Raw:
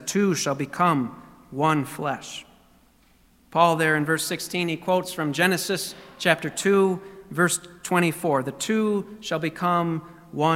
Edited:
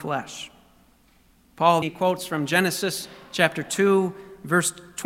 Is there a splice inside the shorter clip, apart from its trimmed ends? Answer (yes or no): yes